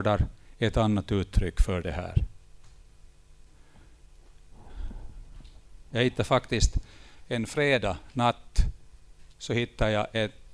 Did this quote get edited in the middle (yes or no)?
yes